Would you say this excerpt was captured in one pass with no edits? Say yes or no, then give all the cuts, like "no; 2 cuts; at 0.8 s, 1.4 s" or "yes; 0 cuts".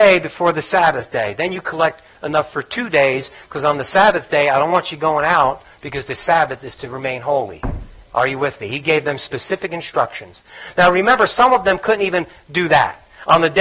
yes; 0 cuts